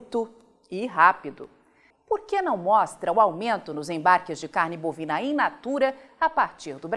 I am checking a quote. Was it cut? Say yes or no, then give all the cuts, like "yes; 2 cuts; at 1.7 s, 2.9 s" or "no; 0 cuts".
yes; 1 cut; at 1.9 s